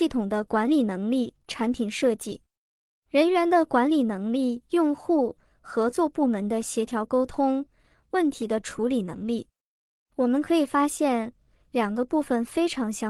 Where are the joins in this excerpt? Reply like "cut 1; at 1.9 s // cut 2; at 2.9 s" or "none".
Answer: none